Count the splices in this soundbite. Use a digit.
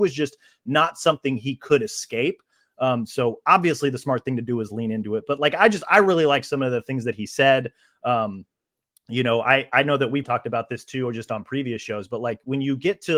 1